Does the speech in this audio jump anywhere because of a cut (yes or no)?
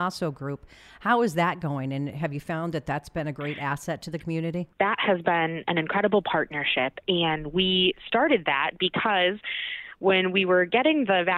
no